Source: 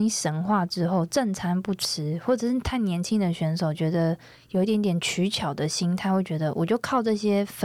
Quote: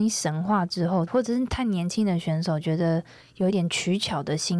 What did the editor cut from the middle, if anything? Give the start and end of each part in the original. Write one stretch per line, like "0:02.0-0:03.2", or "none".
0:01.1-0:02.2
0:04.7-0:04.8